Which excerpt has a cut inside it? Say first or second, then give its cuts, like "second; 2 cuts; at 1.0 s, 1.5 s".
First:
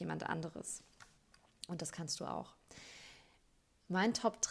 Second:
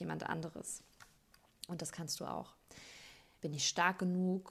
second; 1 cut; at 3.4 s